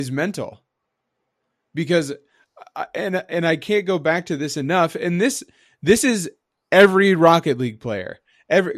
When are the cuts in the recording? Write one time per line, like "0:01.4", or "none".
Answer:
none